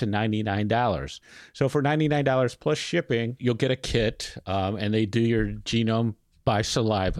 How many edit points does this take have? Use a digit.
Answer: 0